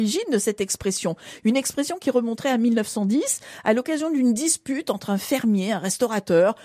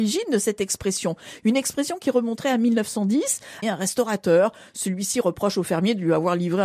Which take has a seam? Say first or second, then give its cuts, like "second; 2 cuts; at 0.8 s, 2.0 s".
second; 1 cut; at 3.6 s